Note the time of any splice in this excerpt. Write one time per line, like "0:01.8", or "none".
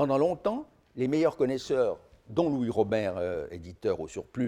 none